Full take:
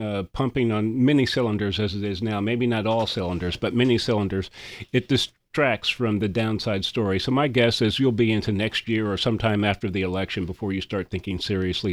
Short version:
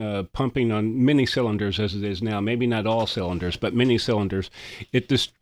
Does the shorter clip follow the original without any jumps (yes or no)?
yes